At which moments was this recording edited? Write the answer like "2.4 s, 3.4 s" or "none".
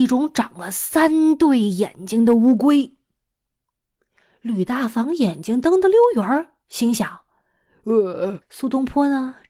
8.4 s